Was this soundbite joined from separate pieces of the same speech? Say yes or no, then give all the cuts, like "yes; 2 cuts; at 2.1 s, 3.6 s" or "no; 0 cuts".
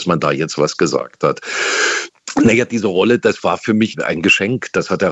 no; 0 cuts